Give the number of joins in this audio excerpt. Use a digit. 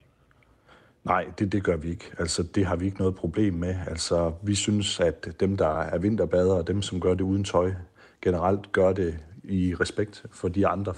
0